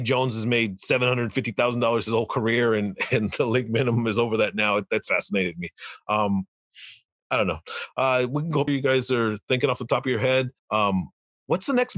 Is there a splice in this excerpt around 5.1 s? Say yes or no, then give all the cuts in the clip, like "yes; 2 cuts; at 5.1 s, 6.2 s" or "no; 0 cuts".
yes; 3 cuts; at 5.1 s, 8.7 s, 10.6 s